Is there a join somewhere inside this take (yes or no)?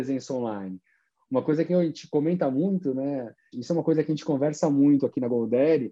yes